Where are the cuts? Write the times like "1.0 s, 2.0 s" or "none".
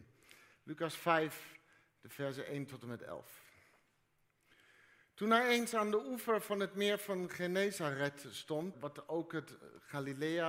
8.7 s